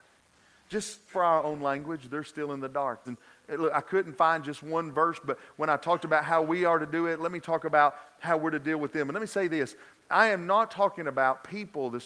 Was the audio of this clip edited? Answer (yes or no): yes